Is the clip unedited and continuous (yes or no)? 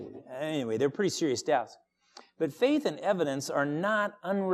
yes